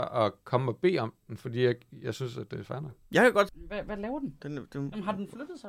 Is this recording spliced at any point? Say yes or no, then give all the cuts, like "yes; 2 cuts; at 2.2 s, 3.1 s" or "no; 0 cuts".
yes; 1 cut; at 3.5 s